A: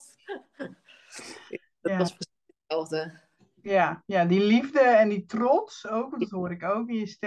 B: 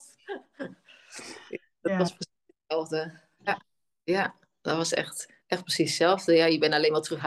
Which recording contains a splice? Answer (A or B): B